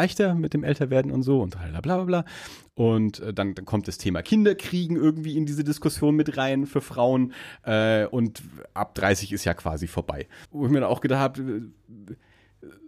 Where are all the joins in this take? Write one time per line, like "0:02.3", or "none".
0:10.5

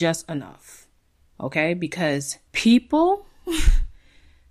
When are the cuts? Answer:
0:02.5

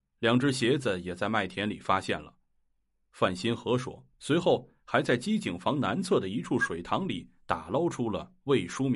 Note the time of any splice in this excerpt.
0:04.1

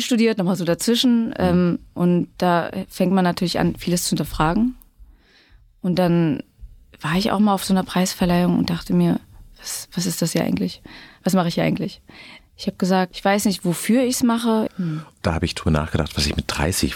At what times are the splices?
0:12.4
0:14.7

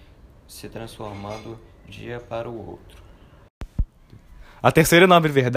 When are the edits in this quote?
0:01.9

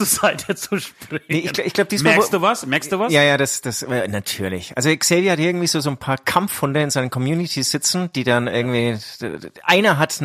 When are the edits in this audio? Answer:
none

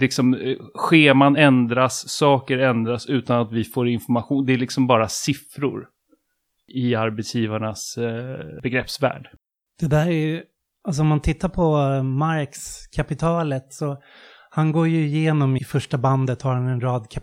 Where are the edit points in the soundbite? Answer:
0:15.6

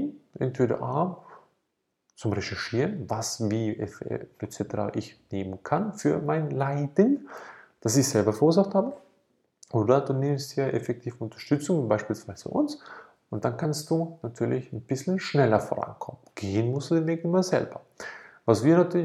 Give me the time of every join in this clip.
none

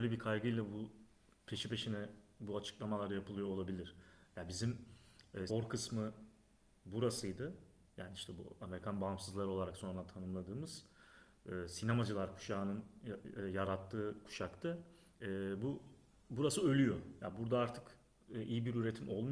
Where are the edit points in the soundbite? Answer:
0:05.5

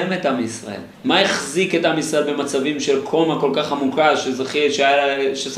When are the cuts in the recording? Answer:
0:00.9

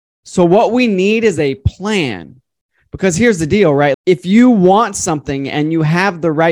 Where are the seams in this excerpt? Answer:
0:03.9

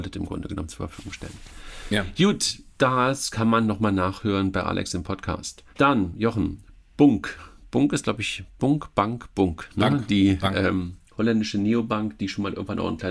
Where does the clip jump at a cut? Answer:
0:05.7

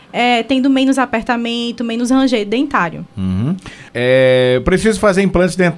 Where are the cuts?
0:03.9

